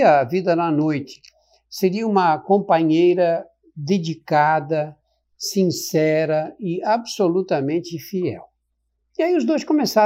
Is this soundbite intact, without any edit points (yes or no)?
yes